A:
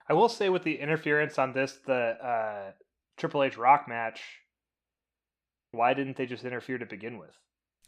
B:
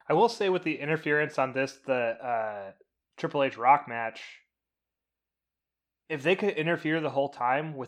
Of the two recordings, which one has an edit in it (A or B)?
A